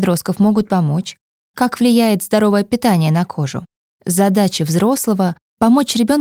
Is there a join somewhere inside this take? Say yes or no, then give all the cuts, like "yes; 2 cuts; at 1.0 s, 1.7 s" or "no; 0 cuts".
yes; 1 cut; at 3.9 s